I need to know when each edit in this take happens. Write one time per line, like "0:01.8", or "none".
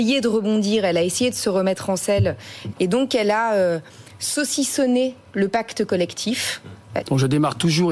0:02.7
0:07.0

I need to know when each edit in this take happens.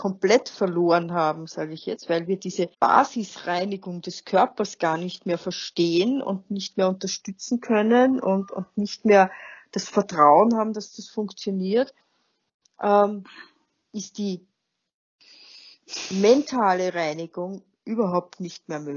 0:02.7

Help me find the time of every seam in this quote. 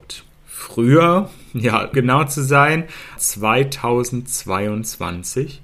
0:01.9
0:03.2

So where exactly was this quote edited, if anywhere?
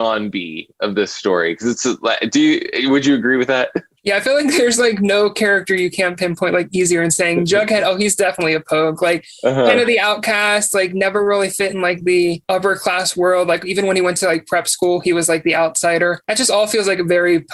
none

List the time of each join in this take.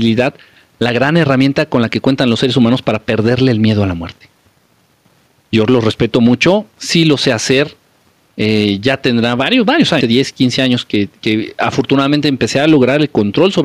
0:10.0

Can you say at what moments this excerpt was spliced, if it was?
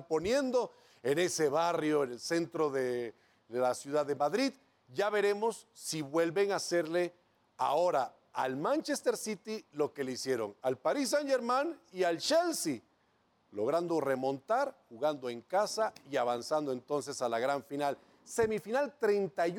none

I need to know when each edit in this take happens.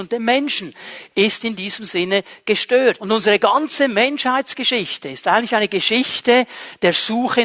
0:03.0

